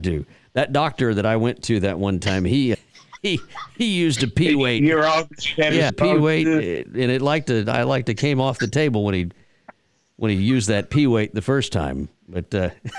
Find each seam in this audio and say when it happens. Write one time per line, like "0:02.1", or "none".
0:02.7
0:05.9